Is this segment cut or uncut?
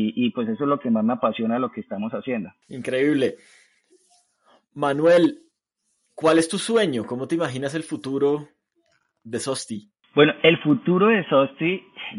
uncut